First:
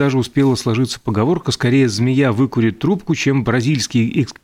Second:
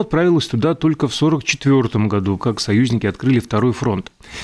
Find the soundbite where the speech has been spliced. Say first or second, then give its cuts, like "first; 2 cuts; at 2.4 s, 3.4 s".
second; 1 cut; at 2.4 s